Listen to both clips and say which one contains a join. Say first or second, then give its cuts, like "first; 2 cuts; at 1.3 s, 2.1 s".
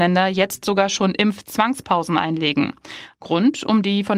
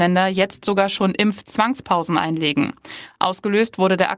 first; 1 cut; at 3.1 s